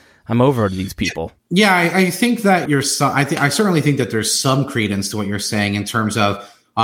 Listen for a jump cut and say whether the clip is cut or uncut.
cut